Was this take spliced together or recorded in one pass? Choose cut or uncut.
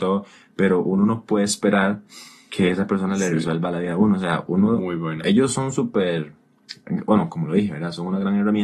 uncut